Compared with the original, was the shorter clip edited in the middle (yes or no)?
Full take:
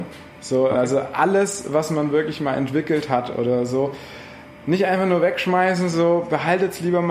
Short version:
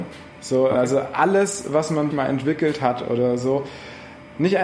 yes